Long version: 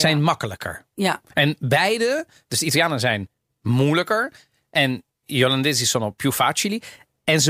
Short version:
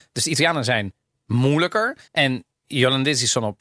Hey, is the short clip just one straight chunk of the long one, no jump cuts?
no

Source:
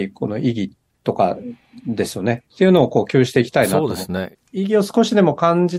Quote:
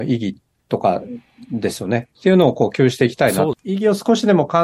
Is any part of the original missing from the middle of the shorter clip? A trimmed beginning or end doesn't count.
yes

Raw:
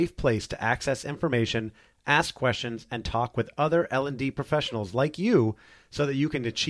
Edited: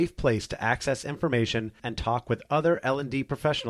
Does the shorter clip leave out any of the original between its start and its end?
yes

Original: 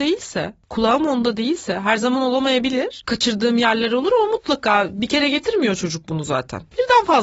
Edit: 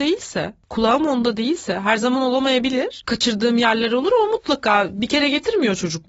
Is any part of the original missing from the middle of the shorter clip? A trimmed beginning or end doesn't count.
no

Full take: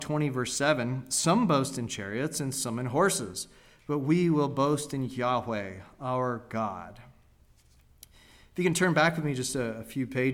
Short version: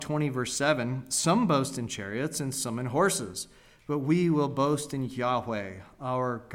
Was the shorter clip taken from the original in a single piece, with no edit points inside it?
yes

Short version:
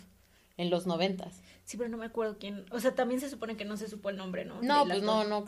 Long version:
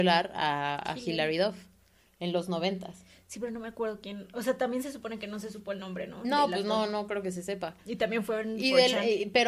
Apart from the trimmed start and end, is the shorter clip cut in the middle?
no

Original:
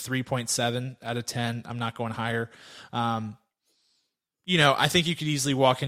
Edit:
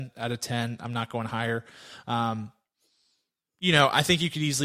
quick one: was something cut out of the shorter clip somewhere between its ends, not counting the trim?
no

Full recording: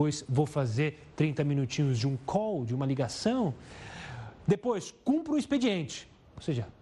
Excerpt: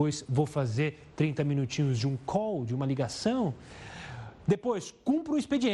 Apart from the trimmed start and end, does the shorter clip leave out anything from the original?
no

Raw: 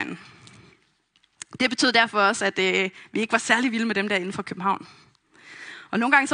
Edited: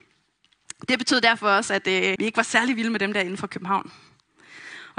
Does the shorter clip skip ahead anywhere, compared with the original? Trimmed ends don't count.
yes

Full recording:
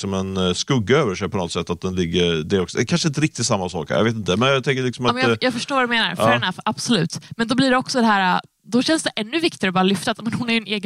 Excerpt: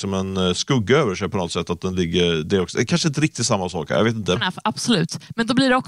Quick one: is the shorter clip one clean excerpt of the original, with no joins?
no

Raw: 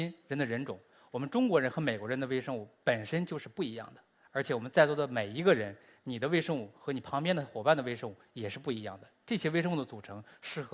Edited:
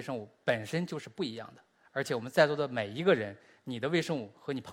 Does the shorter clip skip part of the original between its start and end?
no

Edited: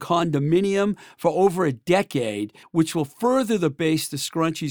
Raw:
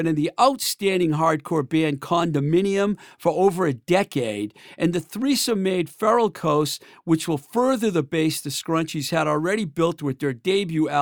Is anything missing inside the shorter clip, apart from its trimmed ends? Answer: yes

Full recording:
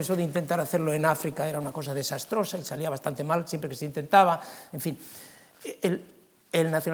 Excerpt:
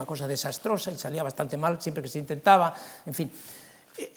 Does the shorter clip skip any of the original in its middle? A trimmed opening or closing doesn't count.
no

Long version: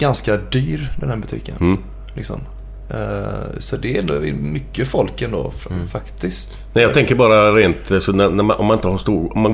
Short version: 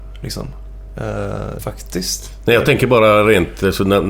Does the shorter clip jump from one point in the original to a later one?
yes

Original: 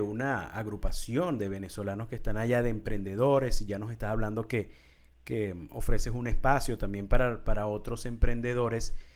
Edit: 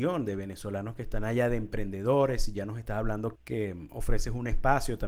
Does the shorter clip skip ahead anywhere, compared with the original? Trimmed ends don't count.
yes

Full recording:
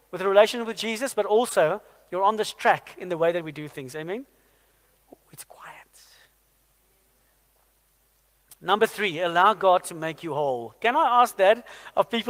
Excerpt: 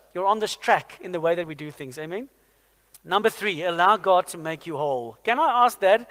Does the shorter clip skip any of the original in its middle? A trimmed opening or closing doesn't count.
yes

